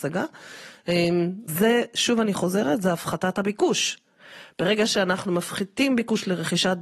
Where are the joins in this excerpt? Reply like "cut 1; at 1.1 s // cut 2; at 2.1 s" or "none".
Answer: cut 1; at 1.5 s